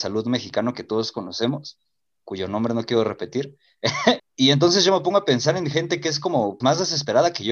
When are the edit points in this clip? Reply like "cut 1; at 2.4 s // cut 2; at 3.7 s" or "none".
cut 1; at 4.2 s // cut 2; at 6.6 s